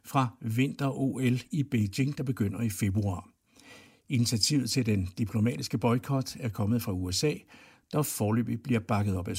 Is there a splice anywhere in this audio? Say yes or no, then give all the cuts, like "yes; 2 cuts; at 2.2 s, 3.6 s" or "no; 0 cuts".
no; 0 cuts